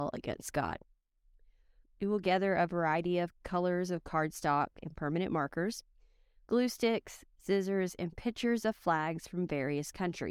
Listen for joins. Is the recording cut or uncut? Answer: cut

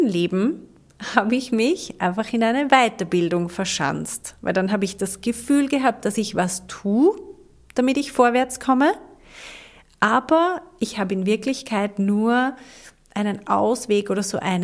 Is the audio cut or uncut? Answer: uncut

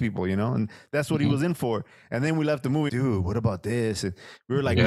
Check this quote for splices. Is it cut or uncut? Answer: cut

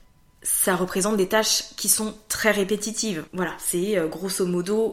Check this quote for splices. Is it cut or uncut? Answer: cut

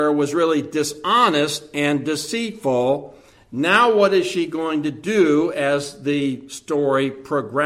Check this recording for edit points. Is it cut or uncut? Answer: uncut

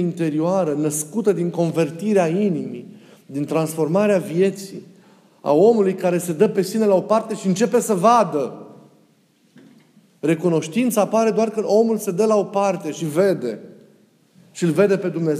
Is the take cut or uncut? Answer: uncut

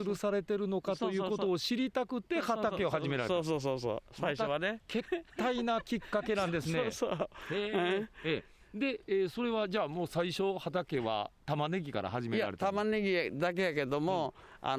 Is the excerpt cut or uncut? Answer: uncut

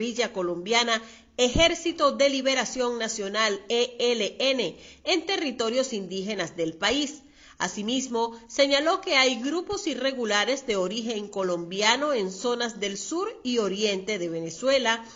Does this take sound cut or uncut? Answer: uncut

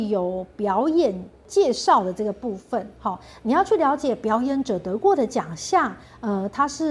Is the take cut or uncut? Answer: uncut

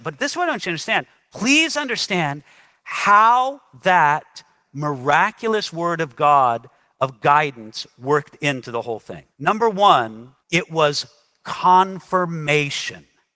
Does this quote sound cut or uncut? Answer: cut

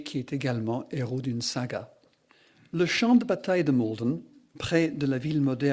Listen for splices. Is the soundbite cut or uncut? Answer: uncut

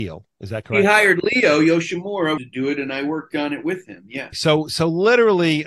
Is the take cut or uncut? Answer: cut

